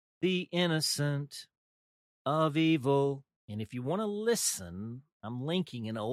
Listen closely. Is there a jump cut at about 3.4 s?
yes; 1 cut; at 3.4 s

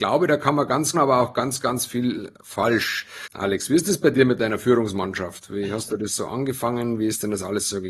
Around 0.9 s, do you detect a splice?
yes; 1 cut; at 0.9 s

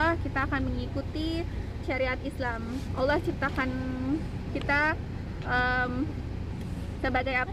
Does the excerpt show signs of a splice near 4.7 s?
no; 1 cut; at 1.8 s

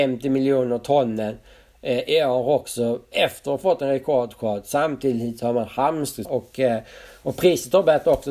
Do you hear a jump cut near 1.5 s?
no; 1 cut; at 6.2 s

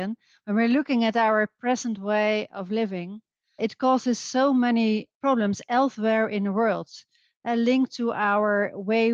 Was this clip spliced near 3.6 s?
yes; 1 cut; at 3.6 s

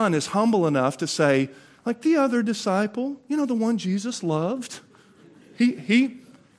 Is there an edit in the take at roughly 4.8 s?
no; 0 cuts

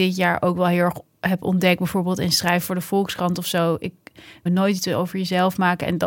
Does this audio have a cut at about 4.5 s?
yes; 1 cut; at 4.5 s

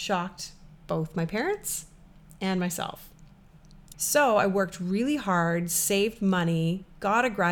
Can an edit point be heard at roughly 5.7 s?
no; 1 cut; at 3.9 s

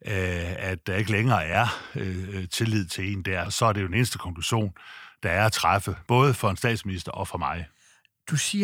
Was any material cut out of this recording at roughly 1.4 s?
no; 2 cuts; at 3.5 s, 6.1 s

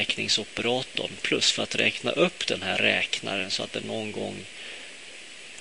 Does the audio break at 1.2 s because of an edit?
yes; 1 cut; at 1.2 s

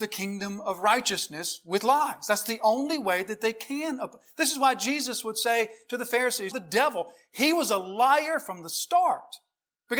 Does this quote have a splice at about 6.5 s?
yes; 1 cut; at 6.5 s

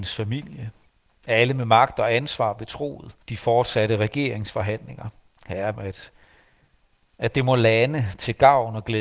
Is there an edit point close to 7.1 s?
no; 2 cuts; at 3.2 s, 5.7 s

